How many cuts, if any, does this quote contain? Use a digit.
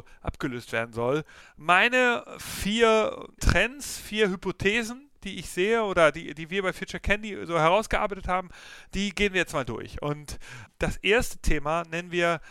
1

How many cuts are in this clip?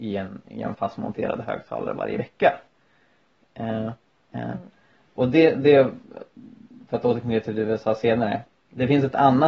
1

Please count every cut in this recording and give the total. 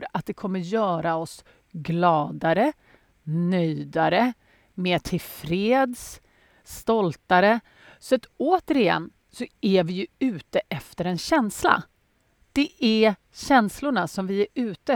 0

